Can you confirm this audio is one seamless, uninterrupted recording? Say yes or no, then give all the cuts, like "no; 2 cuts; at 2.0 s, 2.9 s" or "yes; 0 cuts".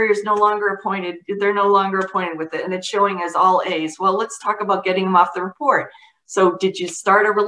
yes; 0 cuts